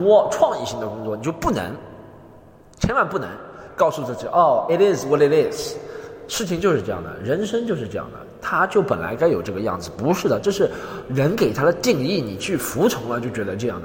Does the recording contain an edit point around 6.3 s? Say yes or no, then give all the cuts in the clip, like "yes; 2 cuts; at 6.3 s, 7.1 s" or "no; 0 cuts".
no; 0 cuts